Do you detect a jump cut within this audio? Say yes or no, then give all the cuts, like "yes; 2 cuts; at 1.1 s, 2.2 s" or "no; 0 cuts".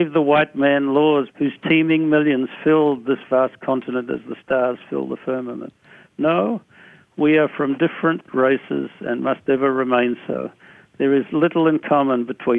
yes; 1 cut; at 1.3 s